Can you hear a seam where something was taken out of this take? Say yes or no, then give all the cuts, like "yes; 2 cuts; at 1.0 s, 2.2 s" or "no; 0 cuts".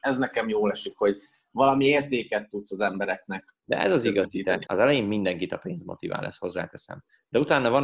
yes; 1 cut; at 4.7 s